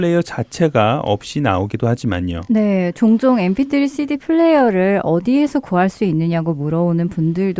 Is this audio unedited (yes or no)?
yes